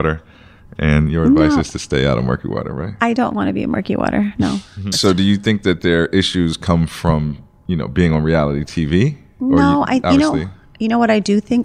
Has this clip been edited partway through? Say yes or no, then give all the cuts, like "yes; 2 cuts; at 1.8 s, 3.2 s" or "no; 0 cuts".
yes; 1 cut; at 4.9 s